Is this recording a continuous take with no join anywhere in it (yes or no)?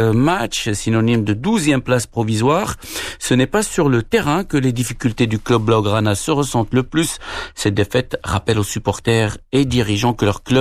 yes